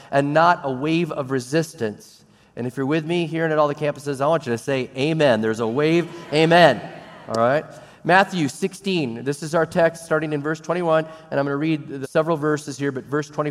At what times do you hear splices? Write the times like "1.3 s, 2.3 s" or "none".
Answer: 12.0 s